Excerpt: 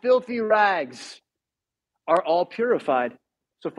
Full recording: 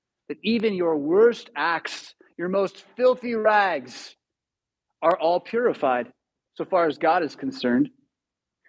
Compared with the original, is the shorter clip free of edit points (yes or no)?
yes